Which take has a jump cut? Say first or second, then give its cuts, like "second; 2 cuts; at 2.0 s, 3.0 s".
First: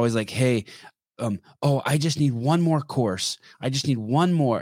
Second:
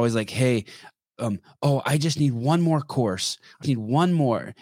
second; 1 cut; at 3.6 s